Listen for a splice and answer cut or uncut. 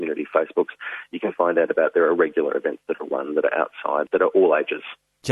uncut